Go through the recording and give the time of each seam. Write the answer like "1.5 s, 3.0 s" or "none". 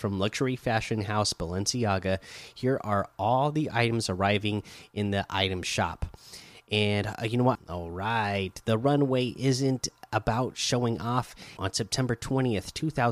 7.5 s, 11.6 s